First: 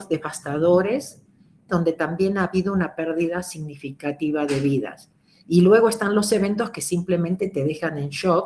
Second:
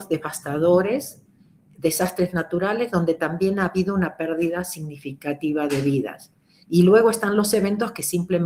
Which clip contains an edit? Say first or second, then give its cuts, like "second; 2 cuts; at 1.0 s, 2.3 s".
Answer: first; 1 cut; at 1.7 s